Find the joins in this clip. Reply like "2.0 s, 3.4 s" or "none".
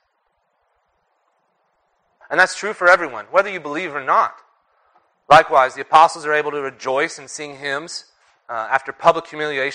2.2 s, 5.1 s